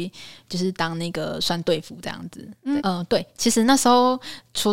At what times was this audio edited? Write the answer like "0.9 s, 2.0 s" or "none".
2.8 s